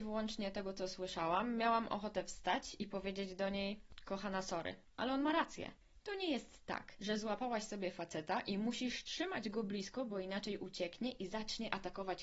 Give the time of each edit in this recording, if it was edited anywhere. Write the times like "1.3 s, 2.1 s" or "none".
6.0 s